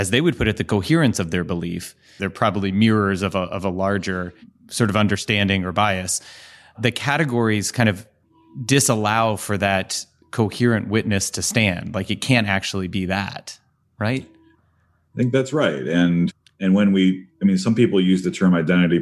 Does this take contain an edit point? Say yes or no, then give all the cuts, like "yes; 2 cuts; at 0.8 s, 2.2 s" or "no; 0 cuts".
yes; 1 cut; at 2.2 s